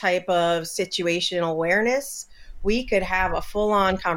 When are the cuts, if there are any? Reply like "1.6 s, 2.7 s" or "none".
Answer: none